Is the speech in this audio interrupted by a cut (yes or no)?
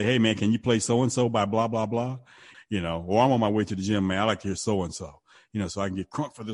yes